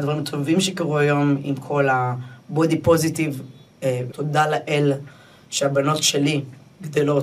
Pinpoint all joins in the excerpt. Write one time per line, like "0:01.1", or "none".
0:04.1